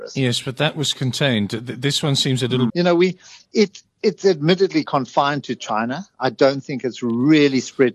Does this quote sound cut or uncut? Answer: cut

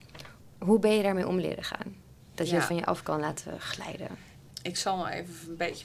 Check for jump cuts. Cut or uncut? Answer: uncut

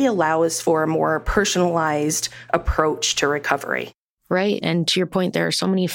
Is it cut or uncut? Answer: uncut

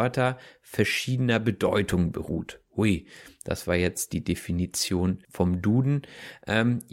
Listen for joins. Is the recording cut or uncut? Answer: cut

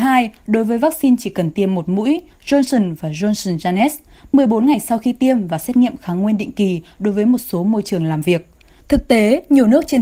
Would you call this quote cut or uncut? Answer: cut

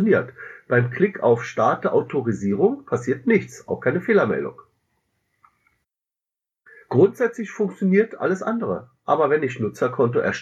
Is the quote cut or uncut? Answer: uncut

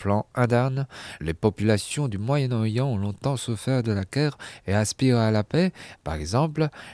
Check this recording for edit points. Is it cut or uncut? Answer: cut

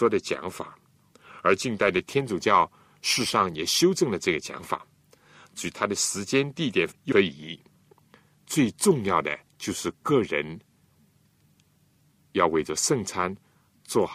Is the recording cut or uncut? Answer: cut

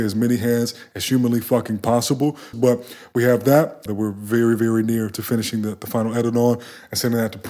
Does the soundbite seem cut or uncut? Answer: cut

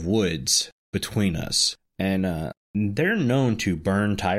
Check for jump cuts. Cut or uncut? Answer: uncut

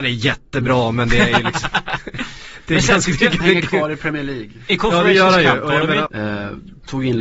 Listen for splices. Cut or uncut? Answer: cut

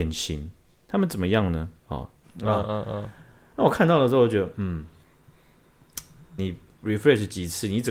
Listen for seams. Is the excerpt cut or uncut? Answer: cut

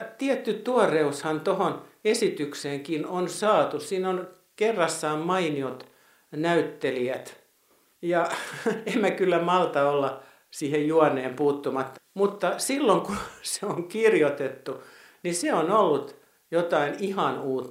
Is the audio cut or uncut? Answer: cut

